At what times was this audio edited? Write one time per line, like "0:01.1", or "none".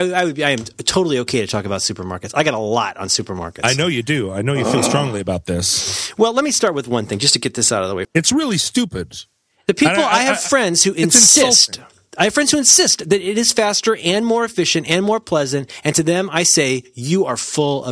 0:08.0